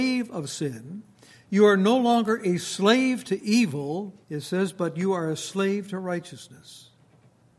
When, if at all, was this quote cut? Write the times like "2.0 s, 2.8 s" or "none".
4.2 s